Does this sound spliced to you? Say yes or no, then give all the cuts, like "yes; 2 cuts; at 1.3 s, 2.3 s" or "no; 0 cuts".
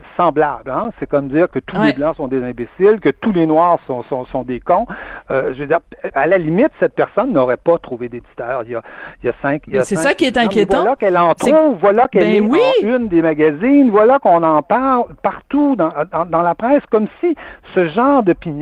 yes; 1 cut; at 6.1 s